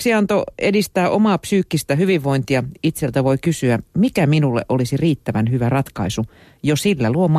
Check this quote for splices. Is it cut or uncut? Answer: uncut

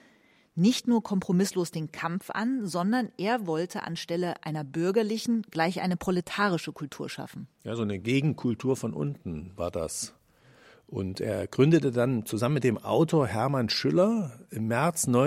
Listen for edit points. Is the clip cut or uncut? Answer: uncut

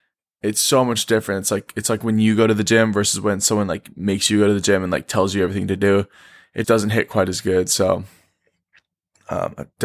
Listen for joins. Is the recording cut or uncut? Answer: cut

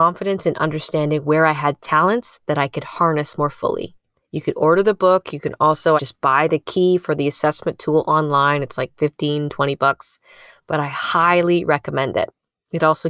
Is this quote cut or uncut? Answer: cut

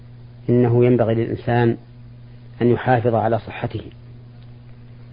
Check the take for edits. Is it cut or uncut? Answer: uncut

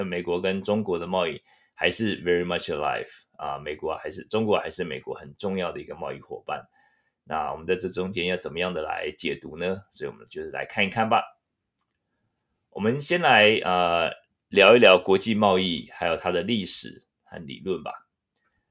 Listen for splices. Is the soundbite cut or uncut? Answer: uncut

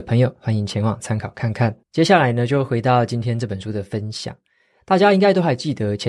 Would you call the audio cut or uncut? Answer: cut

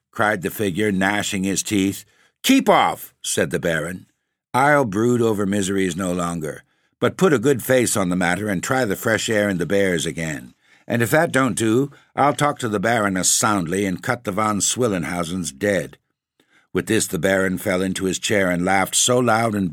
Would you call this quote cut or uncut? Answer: uncut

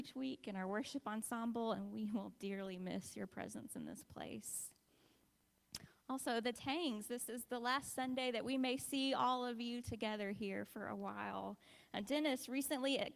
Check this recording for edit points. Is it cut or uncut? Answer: cut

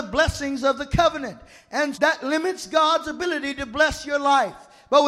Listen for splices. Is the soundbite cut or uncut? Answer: cut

